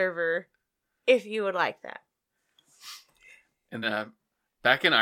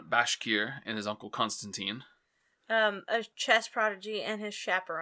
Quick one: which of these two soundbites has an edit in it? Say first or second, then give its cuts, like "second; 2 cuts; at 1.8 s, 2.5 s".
first; 1 cut; at 3.8 s